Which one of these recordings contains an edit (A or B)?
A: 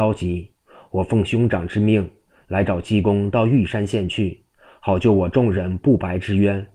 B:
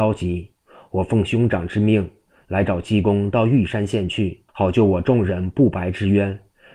B